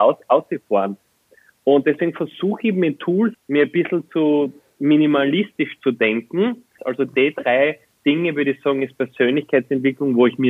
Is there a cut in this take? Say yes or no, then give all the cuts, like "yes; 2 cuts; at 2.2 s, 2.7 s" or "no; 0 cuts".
yes; 2 cuts; at 3.3 s, 6.8 s